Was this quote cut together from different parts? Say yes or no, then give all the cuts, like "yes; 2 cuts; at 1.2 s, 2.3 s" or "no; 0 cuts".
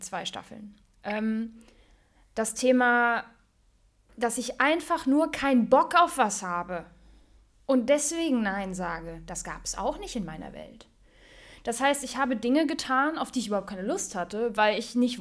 no; 0 cuts